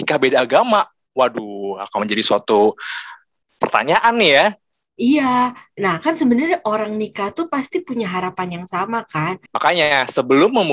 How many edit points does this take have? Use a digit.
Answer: 1